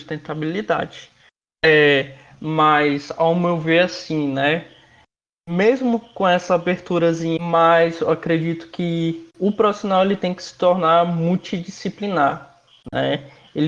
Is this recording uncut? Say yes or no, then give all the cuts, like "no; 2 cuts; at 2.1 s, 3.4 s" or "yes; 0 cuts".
no; 2 cuts; at 7.4 s, 9.3 s